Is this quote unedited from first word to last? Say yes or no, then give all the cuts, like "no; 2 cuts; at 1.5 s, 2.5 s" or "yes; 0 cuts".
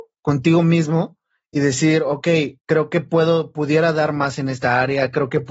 no; 1 cut; at 2.6 s